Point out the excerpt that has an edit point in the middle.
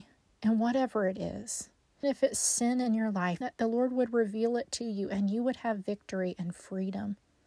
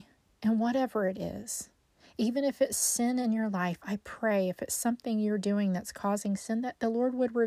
first; 2 cuts; at 2.0 s, 3.4 s

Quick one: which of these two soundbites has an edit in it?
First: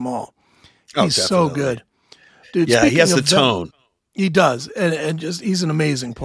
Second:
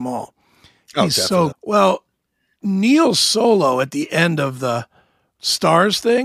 second; 1 cut; at 1.5 s

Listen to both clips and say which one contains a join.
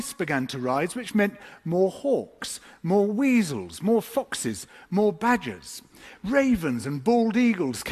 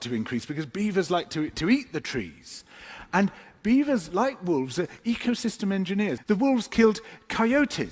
second; 1 cut; at 6.2 s

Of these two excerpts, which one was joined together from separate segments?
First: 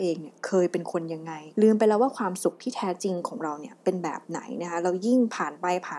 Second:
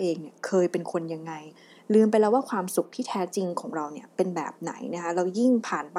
first; 1 cut; at 1.5 s

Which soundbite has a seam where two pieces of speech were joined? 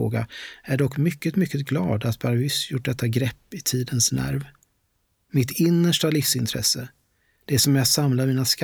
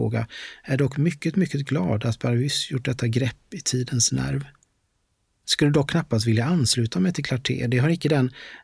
first; 1 cut; at 5.2 s

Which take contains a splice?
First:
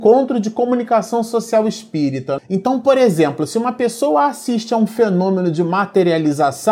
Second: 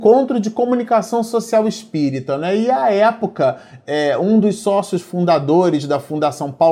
first; 1 cut; at 2.4 s

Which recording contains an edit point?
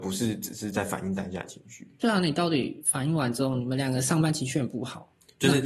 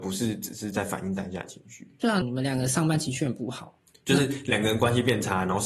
second; 1 cut; at 2.2 s

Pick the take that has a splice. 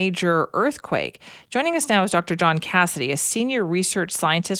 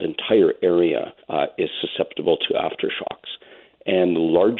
second; 1 cut; at 1.2 s

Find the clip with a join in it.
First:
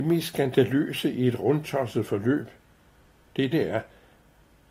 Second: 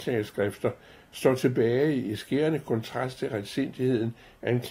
first; 1 cut; at 3.5 s

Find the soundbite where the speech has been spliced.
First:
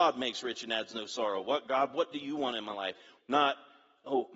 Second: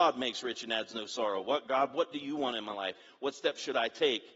first; 1 cut; at 3.2 s

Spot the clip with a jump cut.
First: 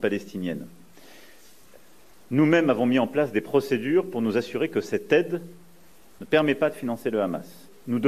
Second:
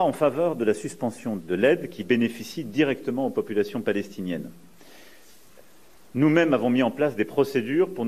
second; 1 cut; at 1.4 s

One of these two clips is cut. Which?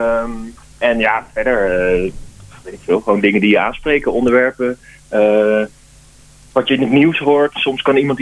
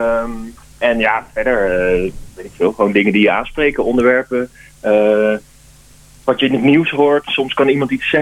second; 1 cut; at 2.3 s

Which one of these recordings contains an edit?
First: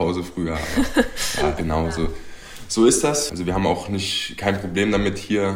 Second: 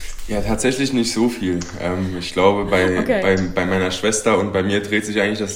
first; 2 cuts; at 1.6 s, 3.3 s

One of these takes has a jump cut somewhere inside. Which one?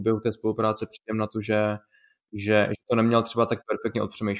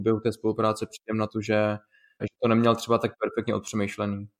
second; 1 cut; at 2.2 s

